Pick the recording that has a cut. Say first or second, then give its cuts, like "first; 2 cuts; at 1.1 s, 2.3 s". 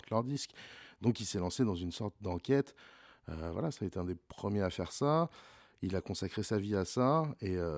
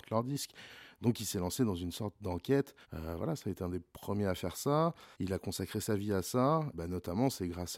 second; 3 cuts; at 2.8 s, 5.1 s, 6.7 s